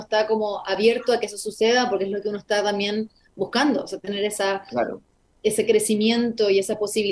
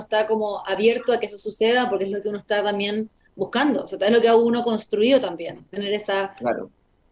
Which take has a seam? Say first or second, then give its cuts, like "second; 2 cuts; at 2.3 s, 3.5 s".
first; 1 cut; at 4.0 s